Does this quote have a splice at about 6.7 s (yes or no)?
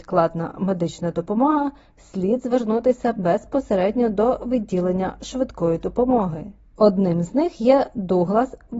yes